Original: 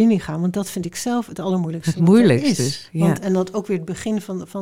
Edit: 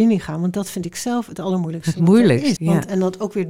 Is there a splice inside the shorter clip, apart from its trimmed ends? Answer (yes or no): yes